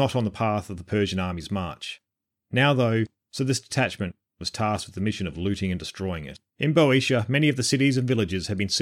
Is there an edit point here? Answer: yes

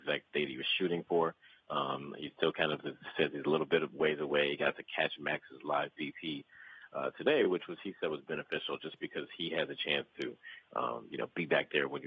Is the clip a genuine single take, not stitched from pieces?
yes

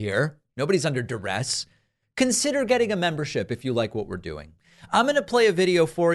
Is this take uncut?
yes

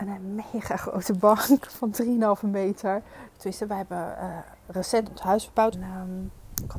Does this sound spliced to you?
yes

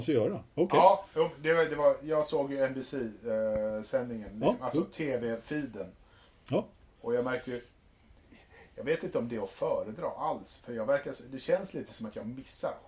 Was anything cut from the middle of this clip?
no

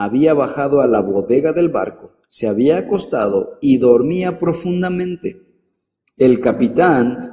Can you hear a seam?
yes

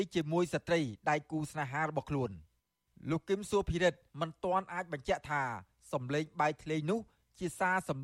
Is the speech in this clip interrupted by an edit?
yes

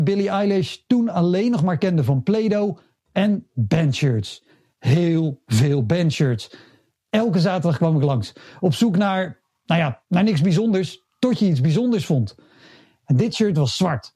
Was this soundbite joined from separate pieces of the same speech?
no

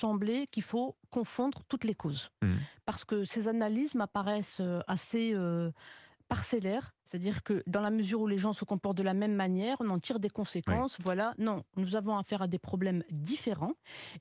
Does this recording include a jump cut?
yes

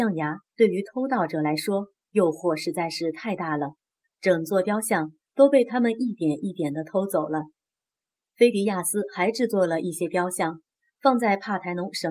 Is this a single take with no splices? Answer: yes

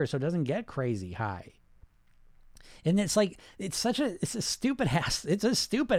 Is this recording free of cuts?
yes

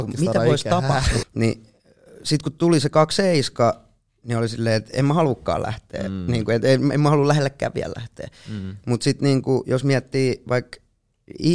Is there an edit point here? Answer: yes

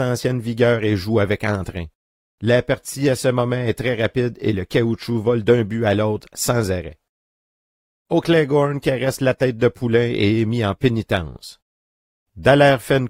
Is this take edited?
no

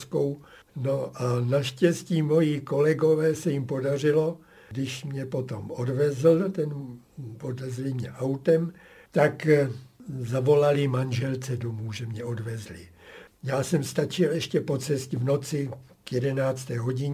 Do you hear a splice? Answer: yes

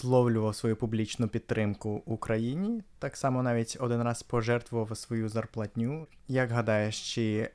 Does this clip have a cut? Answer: no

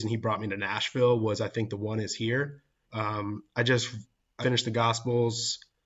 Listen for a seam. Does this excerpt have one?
yes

